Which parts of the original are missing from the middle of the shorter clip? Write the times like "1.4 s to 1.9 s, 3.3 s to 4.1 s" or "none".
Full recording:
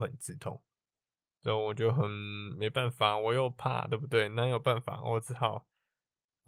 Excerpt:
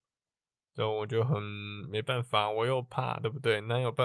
none